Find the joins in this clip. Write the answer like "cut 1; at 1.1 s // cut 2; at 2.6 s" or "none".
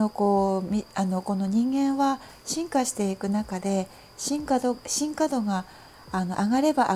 none